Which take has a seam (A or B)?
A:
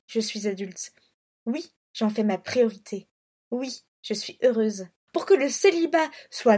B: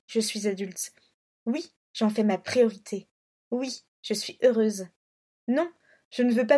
A